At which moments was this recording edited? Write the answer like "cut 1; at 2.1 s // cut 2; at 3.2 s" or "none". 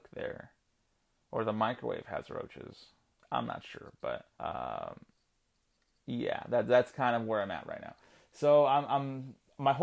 cut 1; at 4.3 s